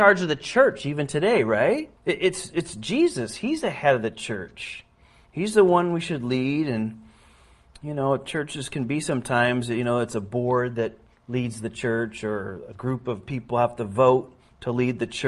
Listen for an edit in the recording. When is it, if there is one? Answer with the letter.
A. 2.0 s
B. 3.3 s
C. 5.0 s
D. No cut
A